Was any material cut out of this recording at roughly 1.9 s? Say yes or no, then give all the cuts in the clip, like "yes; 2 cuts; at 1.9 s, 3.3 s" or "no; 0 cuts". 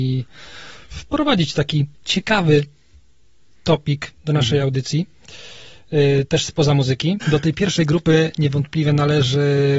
yes; 2 cuts; at 1.9 s, 7.2 s